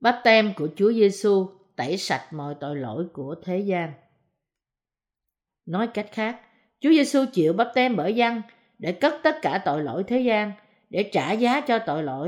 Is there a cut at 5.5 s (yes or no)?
yes